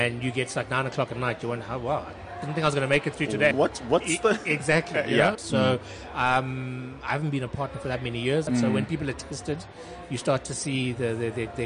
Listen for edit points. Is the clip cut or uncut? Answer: cut